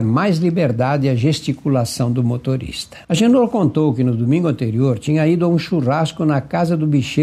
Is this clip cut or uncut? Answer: cut